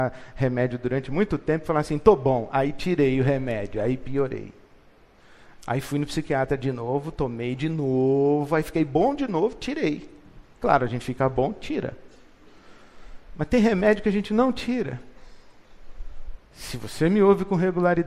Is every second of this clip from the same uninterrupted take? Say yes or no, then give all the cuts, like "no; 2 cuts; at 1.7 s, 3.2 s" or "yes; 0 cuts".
no; 2 cuts; at 10.5 s, 16.4 s